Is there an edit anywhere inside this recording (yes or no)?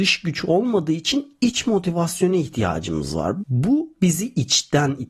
yes